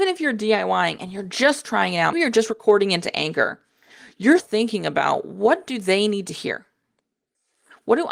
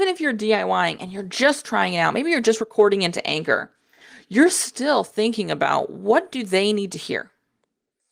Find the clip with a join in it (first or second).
first